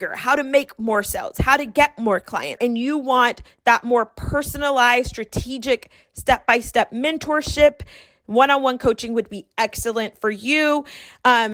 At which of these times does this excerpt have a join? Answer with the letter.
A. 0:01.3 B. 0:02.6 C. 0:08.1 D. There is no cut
B